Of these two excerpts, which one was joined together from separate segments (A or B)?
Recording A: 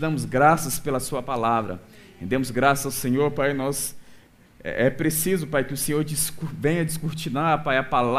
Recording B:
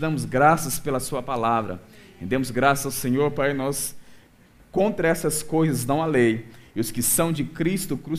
B